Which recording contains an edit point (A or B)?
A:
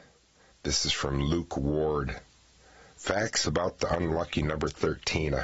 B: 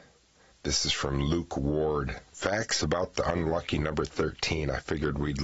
B